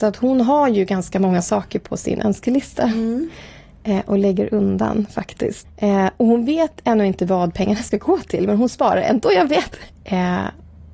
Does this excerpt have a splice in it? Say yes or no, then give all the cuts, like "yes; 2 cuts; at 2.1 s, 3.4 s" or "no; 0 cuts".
yes; 2 cuts; at 5.6 s, 9.9 s